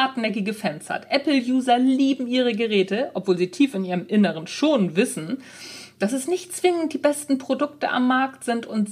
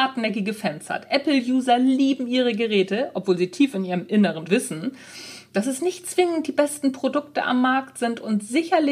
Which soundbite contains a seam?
second; 1 cut; at 4.5 s

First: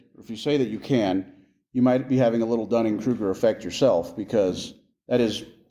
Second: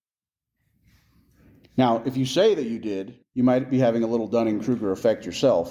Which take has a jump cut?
second; 1 cut; at 3.2 s

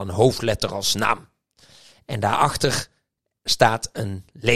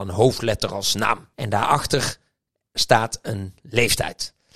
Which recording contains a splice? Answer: second; 1 cut; at 1.3 s

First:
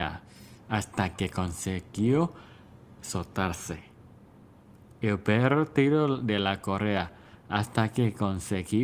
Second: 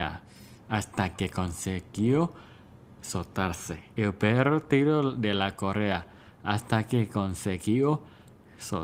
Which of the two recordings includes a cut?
second; 1 cut; at 3.9 s

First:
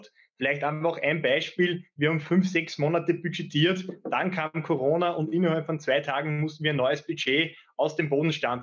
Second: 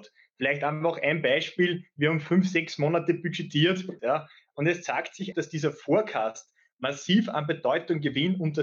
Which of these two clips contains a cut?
second; 2 cuts; at 4.0 s, 5.3 s

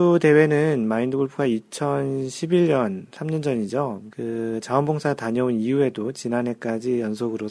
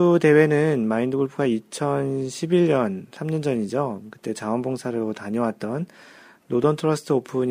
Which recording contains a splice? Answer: first; 1 cut; at 4.1 s

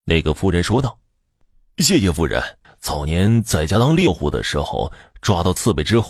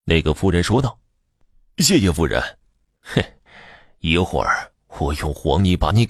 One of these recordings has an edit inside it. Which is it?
first; 1 cut; at 2.6 s

